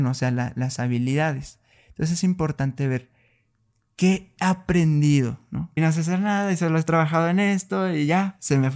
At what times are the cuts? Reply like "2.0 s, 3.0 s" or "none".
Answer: 5.8 s